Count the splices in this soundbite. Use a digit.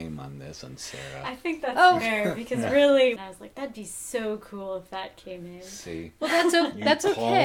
1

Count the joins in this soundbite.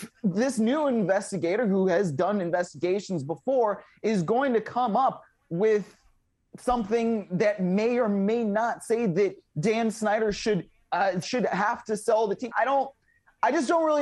2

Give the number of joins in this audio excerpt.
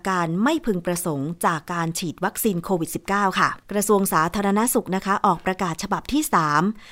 1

